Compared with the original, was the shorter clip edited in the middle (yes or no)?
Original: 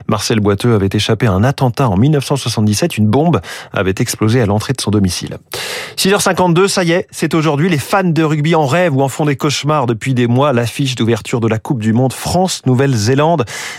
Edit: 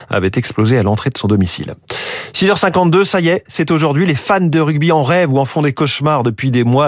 no